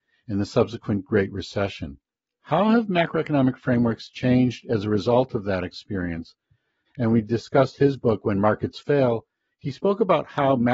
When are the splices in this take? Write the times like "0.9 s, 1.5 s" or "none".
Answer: 2.4 s, 6.9 s